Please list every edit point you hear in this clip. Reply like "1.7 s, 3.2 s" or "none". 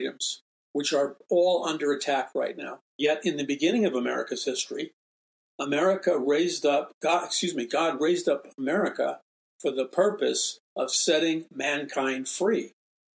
2.9 s